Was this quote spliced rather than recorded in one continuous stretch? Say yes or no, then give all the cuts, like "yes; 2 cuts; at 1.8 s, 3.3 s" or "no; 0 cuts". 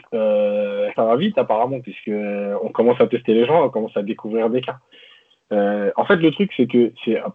yes; 1 cut; at 1.0 s